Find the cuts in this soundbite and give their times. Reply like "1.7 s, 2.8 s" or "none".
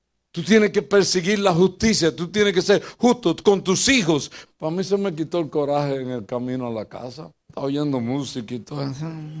4.5 s, 7.4 s

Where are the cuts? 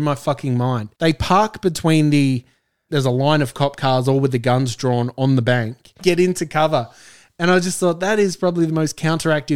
0.9 s, 2.9 s, 6.0 s

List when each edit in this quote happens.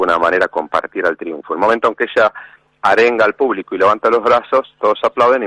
none

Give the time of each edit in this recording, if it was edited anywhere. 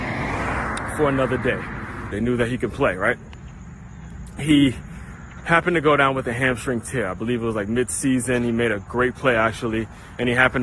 2.1 s

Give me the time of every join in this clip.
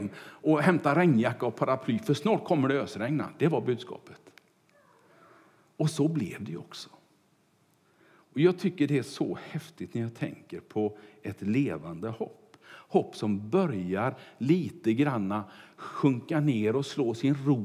none

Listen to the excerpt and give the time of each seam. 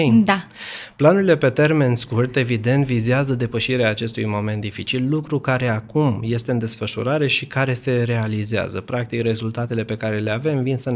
none

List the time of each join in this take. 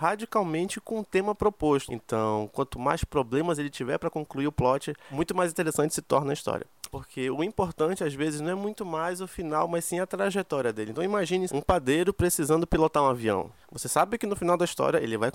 1.9 s, 6.9 s, 11.5 s

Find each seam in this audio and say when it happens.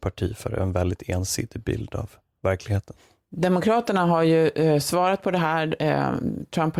none

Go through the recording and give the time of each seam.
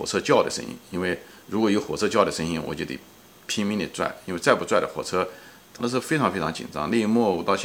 5.8 s

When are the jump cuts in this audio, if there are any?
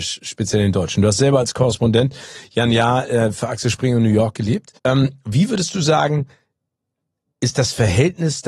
4.8 s

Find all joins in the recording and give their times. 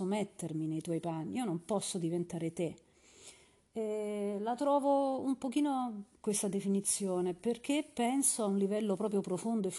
3.7 s, 6.1 s

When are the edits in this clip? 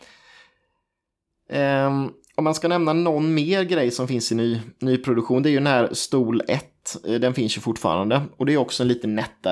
none

